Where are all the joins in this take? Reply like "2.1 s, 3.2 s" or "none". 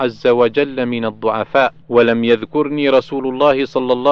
1.8 s